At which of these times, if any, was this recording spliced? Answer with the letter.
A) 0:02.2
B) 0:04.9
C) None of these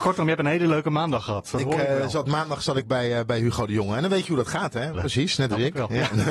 B